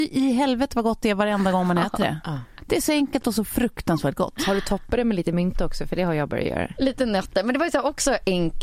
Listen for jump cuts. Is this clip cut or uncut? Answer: cut